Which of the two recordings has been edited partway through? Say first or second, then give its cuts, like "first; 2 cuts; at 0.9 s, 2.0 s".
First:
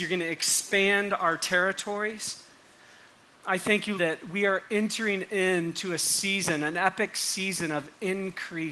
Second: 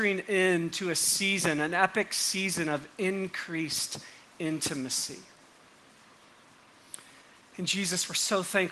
first; 1 cut; at 4.0 s